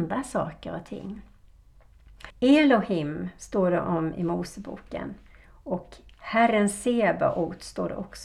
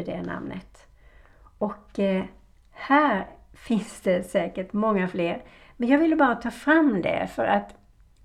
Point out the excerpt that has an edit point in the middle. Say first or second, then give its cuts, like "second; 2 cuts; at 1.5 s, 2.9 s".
first; 1 cut; at 2.3 s